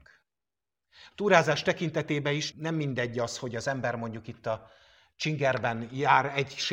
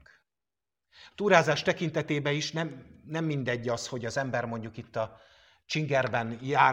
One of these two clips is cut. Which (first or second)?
first